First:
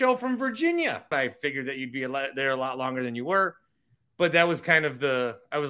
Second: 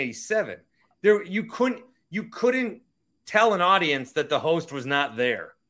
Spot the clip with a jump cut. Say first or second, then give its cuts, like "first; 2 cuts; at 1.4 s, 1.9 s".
first; 1 cut; at 1.1 s